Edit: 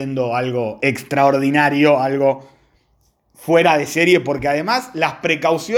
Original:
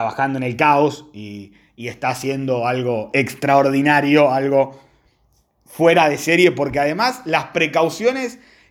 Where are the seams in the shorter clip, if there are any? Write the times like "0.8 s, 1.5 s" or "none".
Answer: none